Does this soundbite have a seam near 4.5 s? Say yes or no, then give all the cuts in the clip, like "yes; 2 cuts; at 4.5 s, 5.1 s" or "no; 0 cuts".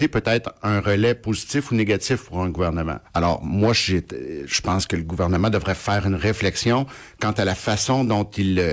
no; 1 cut; at 3.1 s